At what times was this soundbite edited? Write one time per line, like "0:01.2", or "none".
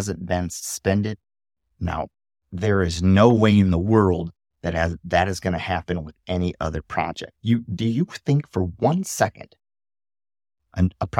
0:07.4